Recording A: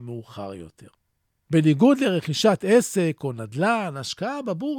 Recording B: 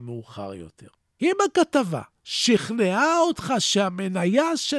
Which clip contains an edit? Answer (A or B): B